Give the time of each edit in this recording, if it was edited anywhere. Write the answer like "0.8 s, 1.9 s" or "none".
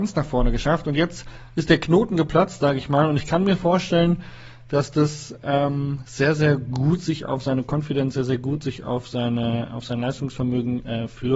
none

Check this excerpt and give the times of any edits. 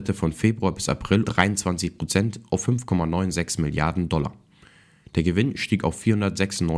1.2 s

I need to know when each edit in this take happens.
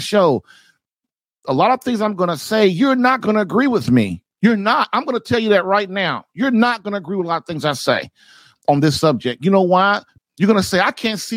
10.2 s

